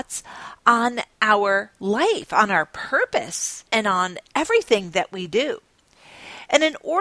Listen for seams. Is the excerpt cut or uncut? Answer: cut